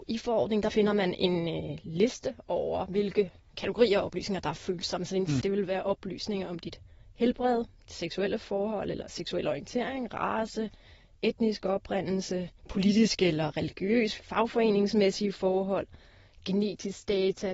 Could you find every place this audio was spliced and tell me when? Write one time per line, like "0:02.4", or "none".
0:05.4
0:12.6
0:14.2

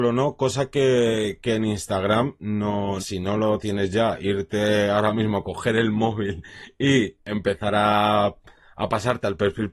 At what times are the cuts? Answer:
0:03.0

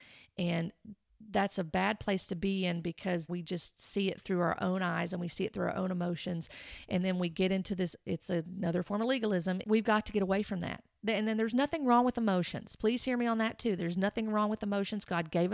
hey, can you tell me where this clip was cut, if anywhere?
0:03.3
0:09.6

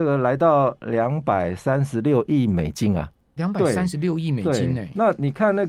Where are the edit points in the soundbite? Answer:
0:03.4

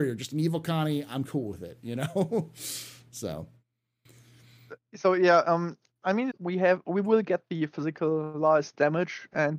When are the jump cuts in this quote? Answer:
0:06.3

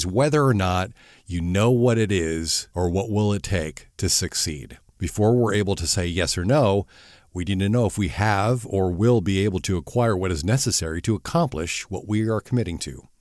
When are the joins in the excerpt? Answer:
none

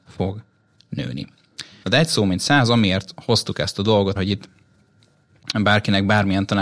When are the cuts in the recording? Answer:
0:01.8
0:04.2

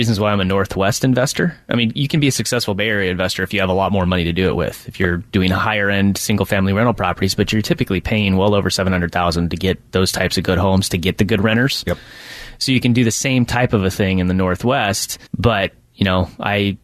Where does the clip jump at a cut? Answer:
0:15.3

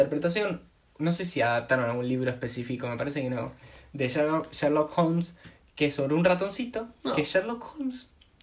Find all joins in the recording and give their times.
none

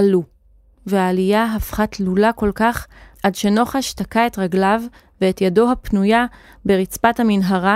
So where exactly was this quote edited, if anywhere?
none

